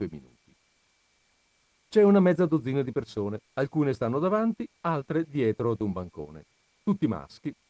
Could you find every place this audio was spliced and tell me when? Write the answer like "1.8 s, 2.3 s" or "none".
1.8 s, 3.4 s